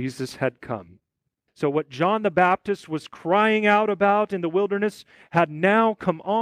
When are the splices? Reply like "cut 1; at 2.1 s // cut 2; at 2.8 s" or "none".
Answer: cut 1; at 1.5 s